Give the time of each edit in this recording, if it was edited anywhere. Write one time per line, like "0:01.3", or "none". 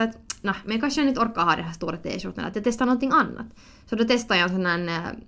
none